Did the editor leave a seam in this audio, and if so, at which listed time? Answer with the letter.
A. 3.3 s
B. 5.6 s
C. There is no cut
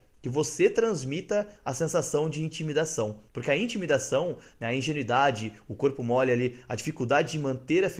A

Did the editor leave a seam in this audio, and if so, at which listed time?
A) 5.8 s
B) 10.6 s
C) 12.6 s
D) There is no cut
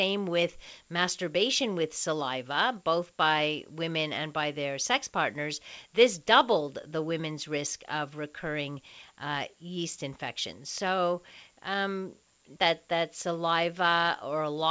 C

